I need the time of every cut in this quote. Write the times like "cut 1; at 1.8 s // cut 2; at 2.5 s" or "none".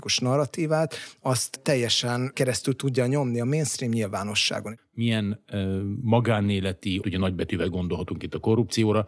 cut 1; at 4.8 s // cut 2; at 7.0 s